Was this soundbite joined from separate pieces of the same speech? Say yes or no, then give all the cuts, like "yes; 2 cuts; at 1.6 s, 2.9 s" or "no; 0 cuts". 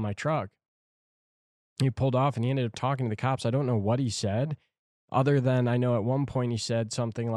no; 0 cuts